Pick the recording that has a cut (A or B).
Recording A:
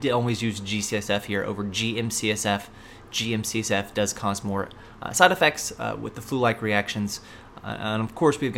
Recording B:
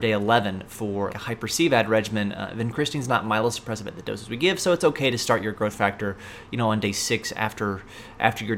B